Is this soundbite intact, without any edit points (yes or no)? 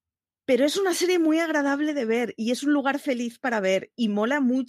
yes